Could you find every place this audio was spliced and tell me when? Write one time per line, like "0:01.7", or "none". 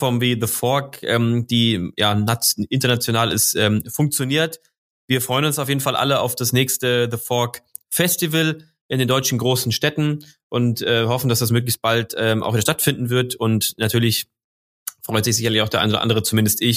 none